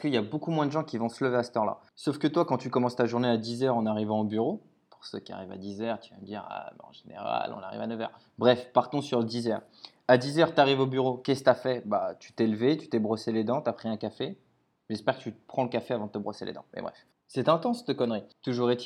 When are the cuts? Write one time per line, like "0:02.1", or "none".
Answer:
0:17.2